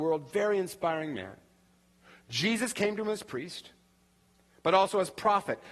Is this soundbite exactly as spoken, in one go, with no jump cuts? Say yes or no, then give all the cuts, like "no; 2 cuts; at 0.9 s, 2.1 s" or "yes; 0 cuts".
yes; 0 cuts